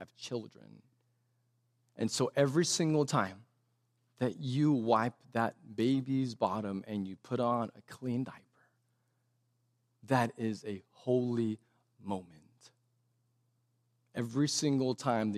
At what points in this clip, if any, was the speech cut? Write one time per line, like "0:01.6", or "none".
none